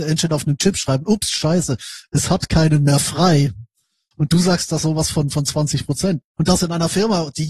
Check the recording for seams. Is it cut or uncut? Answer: uncut